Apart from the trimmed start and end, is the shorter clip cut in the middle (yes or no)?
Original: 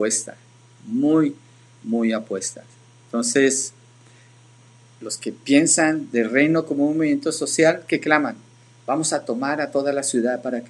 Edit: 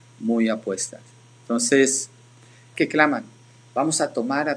yes